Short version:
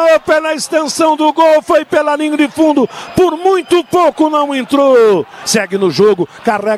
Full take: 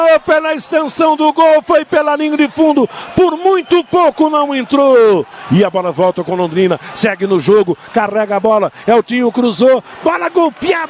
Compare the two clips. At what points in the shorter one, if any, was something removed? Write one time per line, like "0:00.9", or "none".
0:05.4